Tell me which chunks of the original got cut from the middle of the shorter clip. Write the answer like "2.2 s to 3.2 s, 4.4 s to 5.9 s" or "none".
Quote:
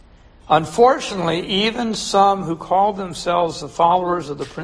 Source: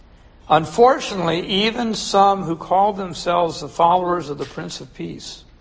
none